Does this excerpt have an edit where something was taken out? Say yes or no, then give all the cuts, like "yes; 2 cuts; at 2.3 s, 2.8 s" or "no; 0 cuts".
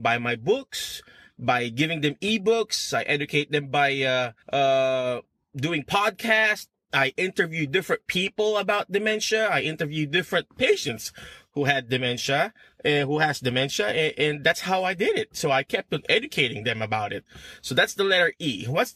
yes; 1 cut; at 4.4 s